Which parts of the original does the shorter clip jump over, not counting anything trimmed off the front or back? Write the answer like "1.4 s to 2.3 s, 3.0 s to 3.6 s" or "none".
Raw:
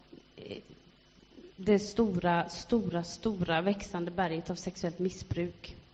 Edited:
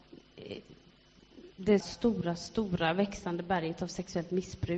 1.8 s to 2.5 s